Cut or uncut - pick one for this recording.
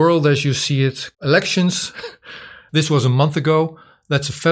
cut